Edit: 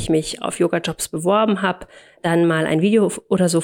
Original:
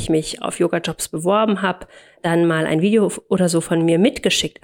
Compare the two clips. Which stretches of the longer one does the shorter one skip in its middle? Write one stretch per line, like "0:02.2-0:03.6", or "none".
none